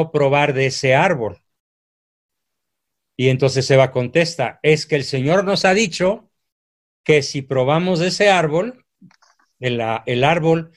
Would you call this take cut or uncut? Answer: uncut